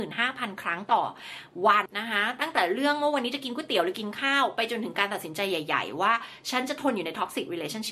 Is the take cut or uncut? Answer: cut